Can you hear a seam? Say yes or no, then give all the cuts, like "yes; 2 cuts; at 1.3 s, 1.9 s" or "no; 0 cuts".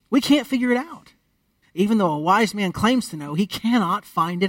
yes; 1 cut; at 1.6 s